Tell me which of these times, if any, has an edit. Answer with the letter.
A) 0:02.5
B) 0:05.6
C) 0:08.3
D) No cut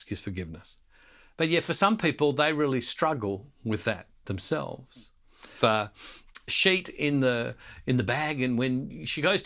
B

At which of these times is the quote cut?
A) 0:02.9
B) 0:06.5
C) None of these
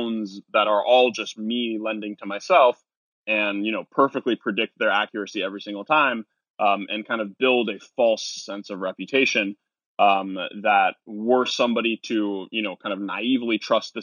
C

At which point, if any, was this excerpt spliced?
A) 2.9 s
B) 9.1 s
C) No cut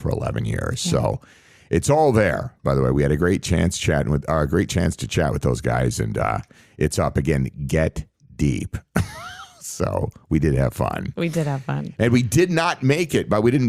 C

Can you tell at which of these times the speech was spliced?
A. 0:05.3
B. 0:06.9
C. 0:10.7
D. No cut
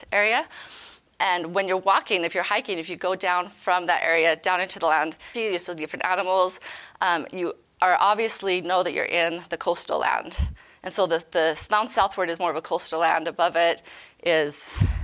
A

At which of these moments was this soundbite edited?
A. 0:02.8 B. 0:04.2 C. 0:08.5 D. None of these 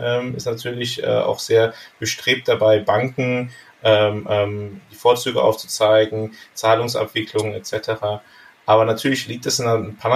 D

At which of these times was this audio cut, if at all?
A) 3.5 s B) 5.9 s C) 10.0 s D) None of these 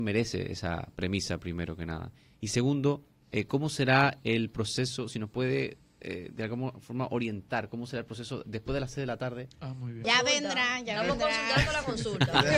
C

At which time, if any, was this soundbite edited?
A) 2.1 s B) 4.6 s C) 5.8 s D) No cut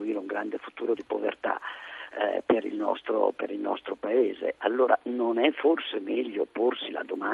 B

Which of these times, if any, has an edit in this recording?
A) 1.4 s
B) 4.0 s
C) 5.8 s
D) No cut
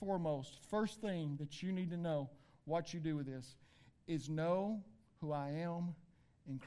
D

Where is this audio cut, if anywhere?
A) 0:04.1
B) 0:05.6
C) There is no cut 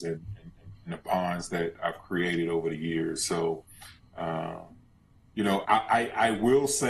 B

